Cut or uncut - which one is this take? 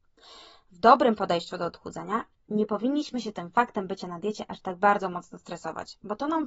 uncut